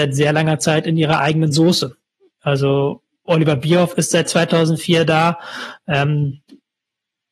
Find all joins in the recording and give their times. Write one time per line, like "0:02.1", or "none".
none